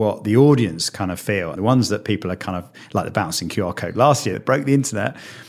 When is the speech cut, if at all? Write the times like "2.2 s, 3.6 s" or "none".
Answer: 1.5 s, 4.3 s

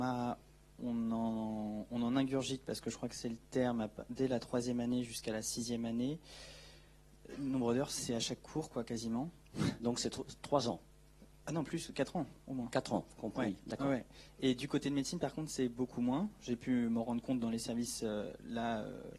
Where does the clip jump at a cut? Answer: none

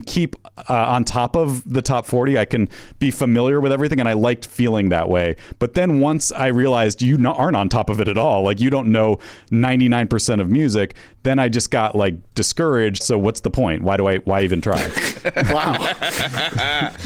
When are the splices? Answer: 13.0 s

